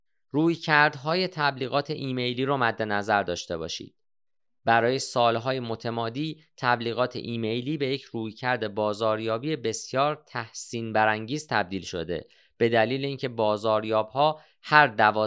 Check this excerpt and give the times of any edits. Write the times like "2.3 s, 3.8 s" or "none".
none